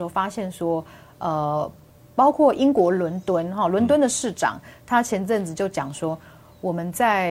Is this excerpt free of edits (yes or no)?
yes